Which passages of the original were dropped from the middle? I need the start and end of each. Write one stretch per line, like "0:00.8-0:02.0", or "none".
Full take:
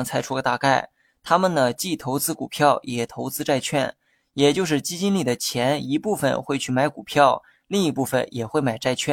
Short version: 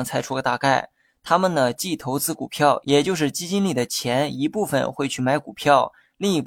0:02.8-0:04.3